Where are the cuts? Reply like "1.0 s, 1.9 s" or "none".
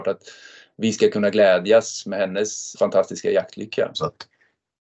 2.7 s, 3.9 s